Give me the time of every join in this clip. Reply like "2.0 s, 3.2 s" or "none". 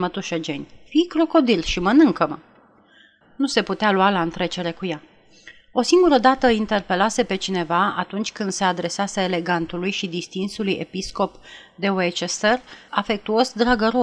3.2 s, 12.9 s

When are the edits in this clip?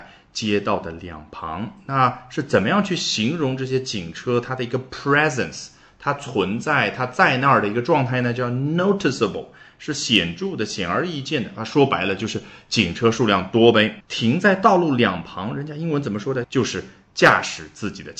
14.0 s, 16.4 s

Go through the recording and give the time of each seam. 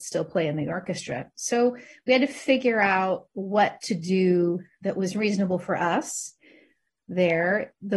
none

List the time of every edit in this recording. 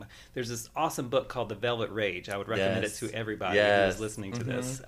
none

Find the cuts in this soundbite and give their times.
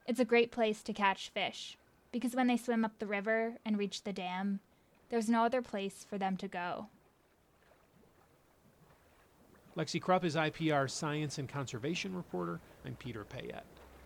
12.8 s

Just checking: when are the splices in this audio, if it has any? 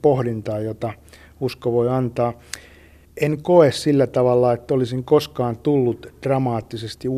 3.0 s

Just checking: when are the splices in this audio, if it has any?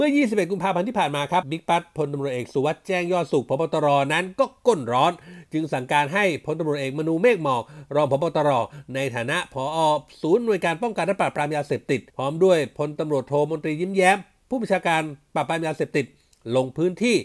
1.4 s, 12.1 s

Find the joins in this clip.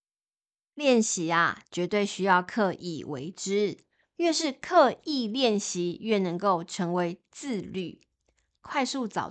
none

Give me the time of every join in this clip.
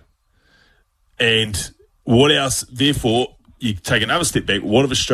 none

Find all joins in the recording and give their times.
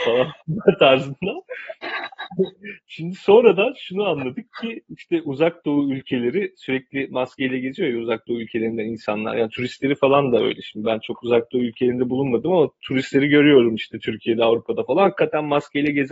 none

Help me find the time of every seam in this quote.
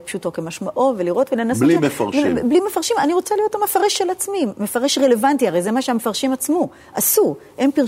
none

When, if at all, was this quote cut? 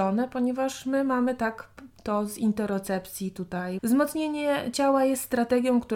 3.8 s

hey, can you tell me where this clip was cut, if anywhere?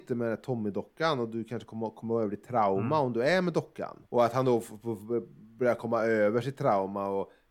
none

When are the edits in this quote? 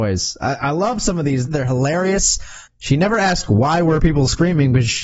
1.5 s, 2.7 s

